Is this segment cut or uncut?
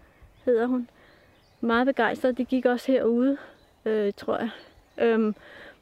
uncut